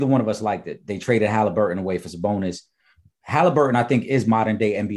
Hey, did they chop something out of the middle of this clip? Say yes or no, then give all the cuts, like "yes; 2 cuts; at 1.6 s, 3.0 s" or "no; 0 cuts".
no; 0 cuts